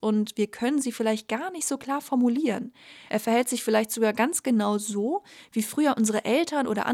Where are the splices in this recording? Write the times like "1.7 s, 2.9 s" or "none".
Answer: 3.1 s